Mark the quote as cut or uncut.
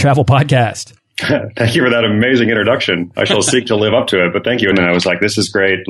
cut